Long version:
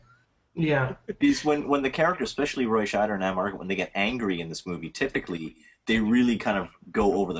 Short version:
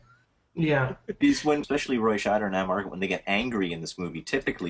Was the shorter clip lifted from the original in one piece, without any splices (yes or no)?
no